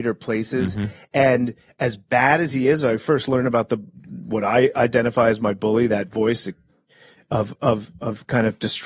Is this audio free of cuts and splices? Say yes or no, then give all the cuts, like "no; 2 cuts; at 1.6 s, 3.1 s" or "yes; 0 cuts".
yes; 0 cuts